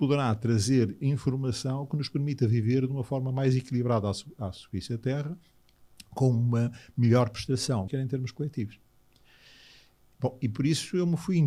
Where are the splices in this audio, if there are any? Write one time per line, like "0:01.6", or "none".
0:07.9

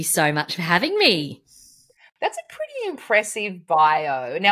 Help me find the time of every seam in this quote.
none

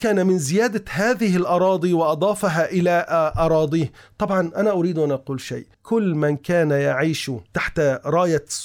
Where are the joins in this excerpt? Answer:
0:05.7

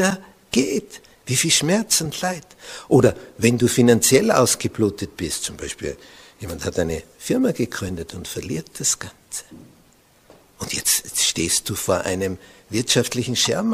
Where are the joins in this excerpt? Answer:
none

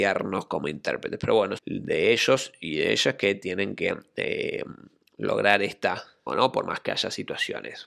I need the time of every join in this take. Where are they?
0:01.6
0:06.3

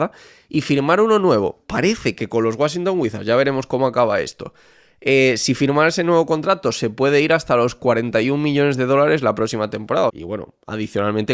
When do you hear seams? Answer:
0:10.1

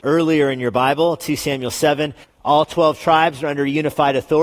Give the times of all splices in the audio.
0:02.2

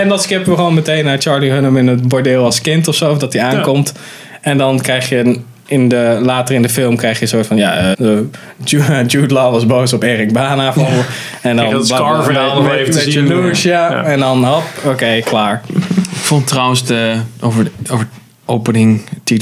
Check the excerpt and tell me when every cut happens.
0:07.9

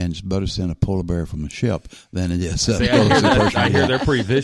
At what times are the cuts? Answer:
none

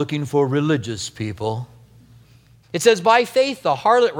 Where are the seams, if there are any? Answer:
0:02.6

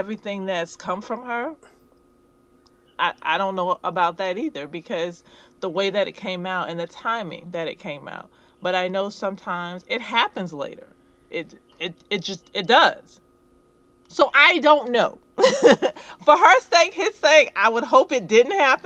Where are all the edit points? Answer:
none

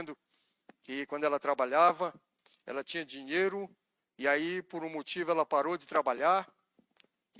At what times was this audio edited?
none

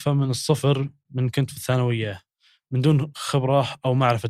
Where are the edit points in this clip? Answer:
none

